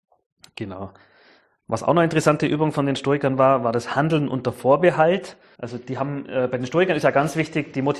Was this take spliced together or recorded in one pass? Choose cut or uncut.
cut